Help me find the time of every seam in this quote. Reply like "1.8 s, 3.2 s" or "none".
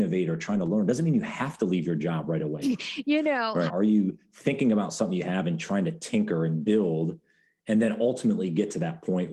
2.6 s, 3.7 s